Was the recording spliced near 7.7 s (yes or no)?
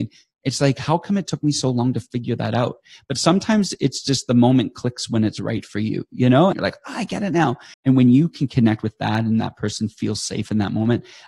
yes